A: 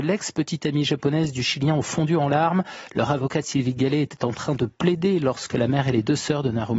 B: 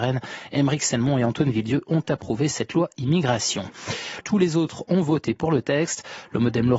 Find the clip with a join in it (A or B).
B